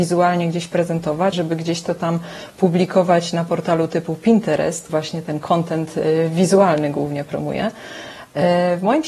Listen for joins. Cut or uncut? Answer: cut